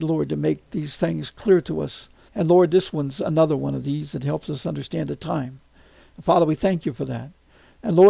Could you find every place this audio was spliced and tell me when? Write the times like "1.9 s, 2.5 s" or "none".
2.3 s